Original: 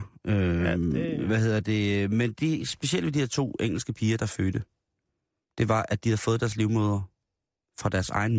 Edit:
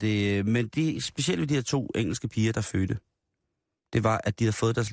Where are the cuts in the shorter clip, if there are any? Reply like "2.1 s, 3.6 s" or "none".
none